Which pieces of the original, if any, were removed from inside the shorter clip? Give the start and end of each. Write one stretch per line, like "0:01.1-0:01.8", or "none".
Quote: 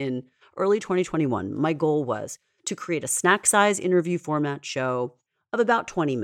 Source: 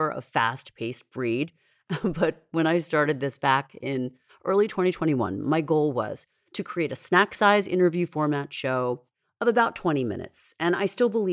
none